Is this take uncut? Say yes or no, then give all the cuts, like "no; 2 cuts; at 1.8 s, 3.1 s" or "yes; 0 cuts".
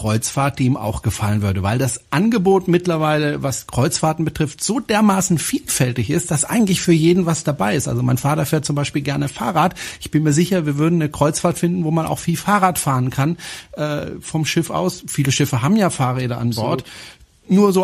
yes; 0 cuts